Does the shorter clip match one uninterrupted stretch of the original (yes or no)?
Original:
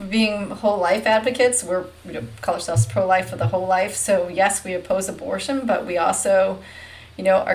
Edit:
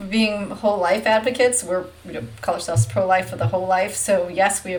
yes